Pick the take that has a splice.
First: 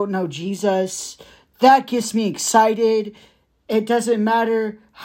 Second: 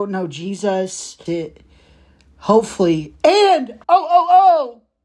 second; 2 cuts; at 1.3 s, 3.8 s

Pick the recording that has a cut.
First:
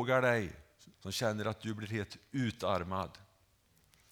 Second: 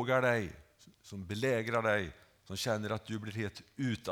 first; 1 cut; at 0.9 s

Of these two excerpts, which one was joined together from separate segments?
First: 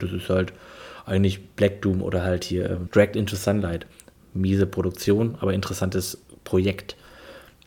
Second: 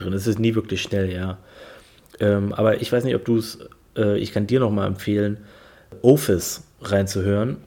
first; 1 cut; at 2.9 s

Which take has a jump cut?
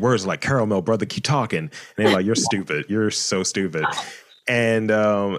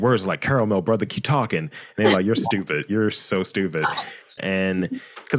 second; 1 cut; at 4.4 s

